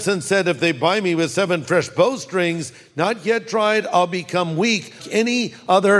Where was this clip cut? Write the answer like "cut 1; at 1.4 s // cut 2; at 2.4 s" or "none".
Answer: cut 1; at 5.0 s